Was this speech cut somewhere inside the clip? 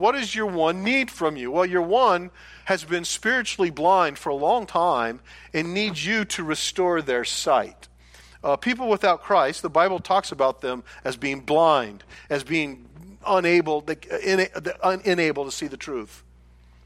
yes; 1 cut; at 12.3 s

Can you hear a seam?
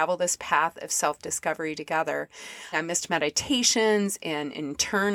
yes; 1 cut; at 2.7 s

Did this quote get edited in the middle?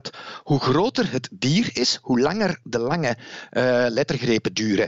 no; 0 cuts

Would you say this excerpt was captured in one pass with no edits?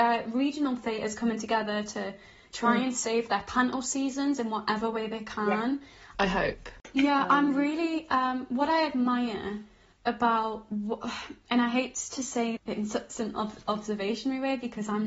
no; 2 cuts; at 6.1 s, 12.6 s

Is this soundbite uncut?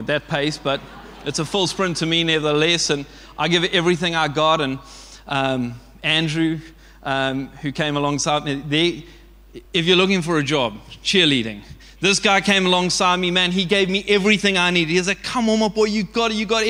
yes; 0 cuts

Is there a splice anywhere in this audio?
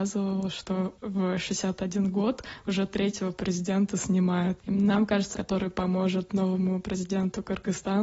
yes; 1 cut; at 5.3 s

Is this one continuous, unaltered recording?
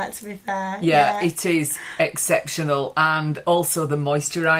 yes; 0 cuts

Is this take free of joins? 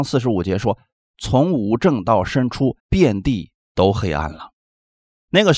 no; 1 cut; at 2.8 s

